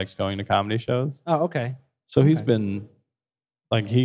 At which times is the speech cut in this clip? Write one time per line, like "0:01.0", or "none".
none